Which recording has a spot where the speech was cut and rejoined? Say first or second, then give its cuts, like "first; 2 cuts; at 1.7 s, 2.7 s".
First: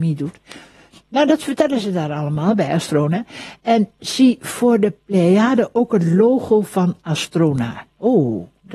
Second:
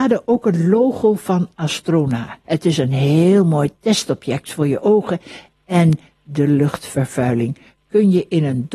second; 1 cut; at 2.4 s